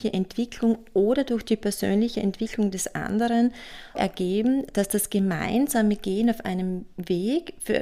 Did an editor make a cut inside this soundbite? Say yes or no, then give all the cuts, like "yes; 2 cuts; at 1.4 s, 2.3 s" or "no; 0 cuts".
yes; 1 cut; at 4.0 s